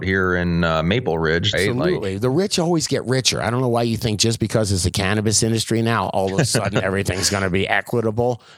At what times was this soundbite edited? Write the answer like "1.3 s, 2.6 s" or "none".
1.5 s